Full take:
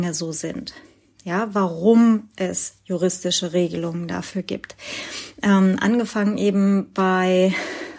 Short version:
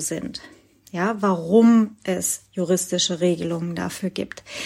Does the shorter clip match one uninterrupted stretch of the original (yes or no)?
yes